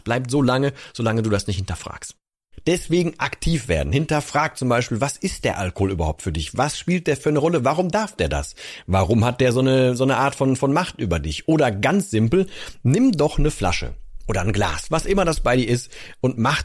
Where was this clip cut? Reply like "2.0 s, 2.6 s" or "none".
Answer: none